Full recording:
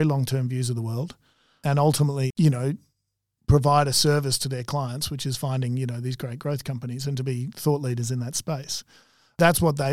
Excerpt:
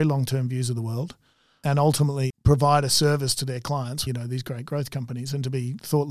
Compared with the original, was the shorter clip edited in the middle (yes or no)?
yes